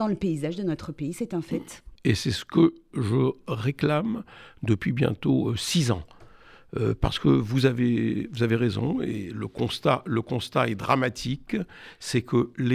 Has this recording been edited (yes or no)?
yes